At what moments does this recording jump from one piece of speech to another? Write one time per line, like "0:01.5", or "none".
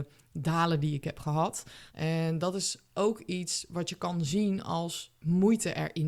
0:01.9